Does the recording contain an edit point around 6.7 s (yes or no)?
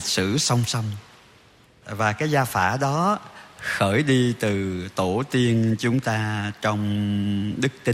no